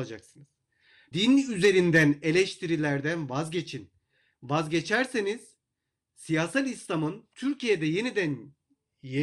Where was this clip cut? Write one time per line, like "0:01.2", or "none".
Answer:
0:01.1